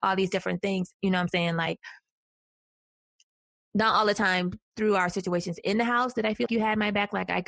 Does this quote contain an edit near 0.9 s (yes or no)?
yes